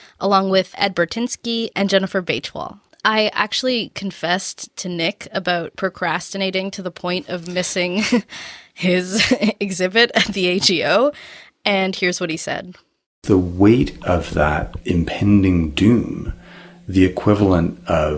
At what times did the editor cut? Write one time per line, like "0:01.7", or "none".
none